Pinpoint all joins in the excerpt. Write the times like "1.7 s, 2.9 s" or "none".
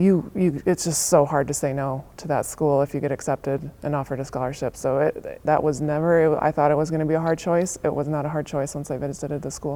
5.5 s